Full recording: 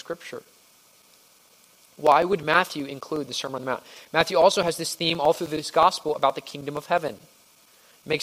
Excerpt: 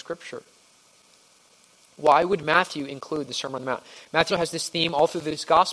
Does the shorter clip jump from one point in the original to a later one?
yes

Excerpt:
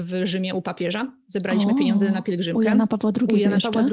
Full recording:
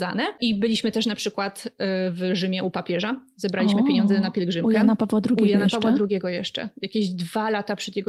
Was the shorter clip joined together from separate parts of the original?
no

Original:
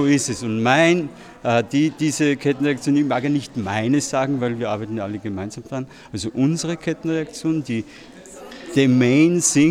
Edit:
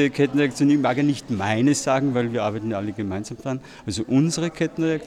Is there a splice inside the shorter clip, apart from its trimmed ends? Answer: no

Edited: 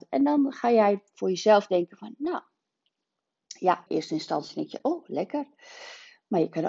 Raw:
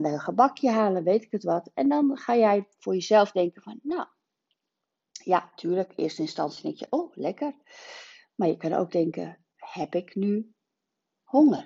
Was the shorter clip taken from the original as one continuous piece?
no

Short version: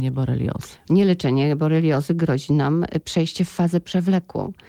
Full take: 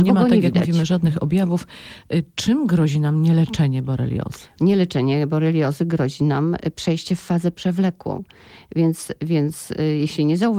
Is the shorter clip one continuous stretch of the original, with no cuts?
yes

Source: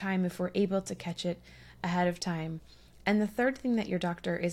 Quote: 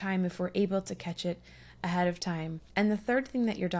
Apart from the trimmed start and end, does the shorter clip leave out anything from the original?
yes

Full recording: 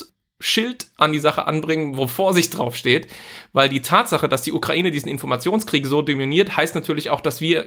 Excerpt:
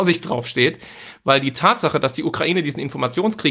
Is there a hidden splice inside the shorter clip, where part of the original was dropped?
no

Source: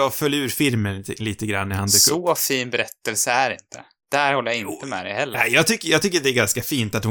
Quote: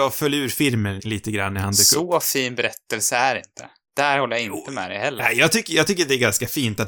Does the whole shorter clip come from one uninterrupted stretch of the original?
no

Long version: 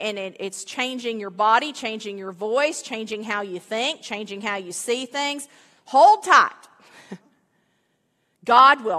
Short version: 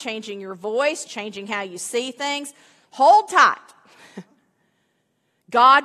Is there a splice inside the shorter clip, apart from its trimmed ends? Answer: yes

